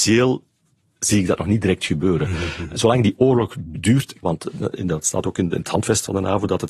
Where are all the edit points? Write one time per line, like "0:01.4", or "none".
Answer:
0:04.2